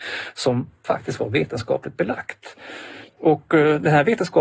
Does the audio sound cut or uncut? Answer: cut